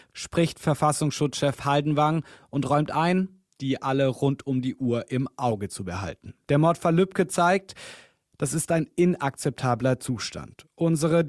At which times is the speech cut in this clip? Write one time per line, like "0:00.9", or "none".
0:03.6